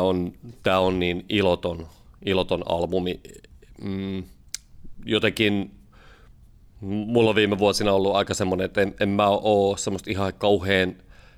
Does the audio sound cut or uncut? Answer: uncut